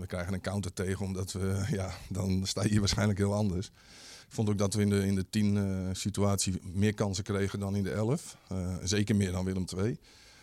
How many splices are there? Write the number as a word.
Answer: one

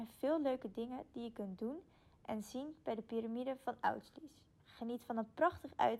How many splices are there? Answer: one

